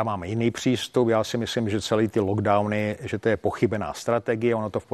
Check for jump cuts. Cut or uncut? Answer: uncut